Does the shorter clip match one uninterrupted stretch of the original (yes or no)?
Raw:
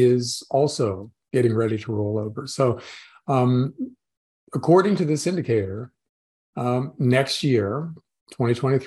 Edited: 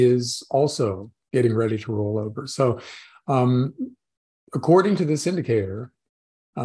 yes